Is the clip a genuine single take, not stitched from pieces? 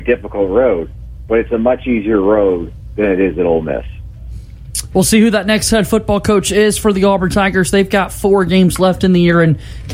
yes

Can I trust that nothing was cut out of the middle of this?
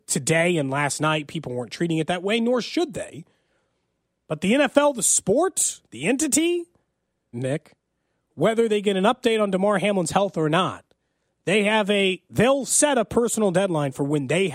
no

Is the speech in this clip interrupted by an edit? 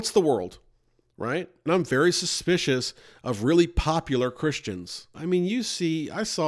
yes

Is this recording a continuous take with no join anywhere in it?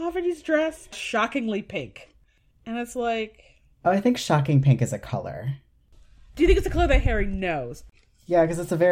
yes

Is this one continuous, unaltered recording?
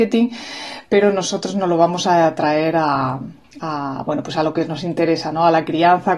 yes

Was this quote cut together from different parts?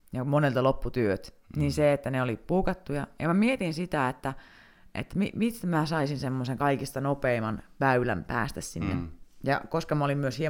no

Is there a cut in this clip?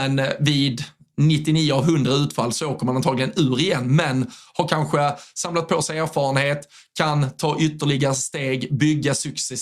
no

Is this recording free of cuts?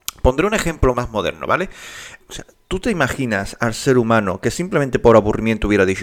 no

